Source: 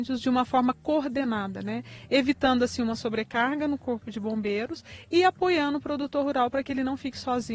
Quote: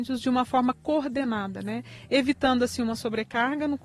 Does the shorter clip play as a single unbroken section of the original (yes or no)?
yes